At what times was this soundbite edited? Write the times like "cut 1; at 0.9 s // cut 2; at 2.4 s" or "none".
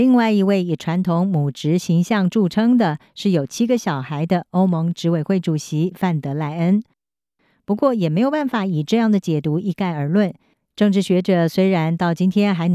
cut 1; at 10.7 s